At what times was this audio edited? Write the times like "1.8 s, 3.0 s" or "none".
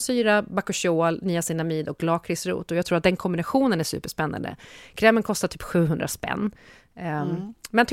none